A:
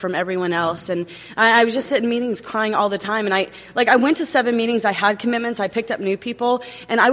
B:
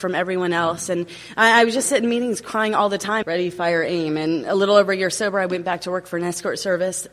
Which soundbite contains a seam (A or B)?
B